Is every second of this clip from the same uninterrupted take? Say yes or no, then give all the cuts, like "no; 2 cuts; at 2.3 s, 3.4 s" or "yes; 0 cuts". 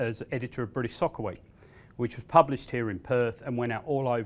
yes; 0 cuts